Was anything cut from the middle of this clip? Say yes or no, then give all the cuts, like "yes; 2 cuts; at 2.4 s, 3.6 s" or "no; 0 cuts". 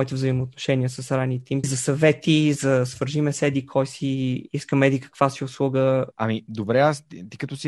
yes; 2 cuts; at 1.6 s, 6.1 s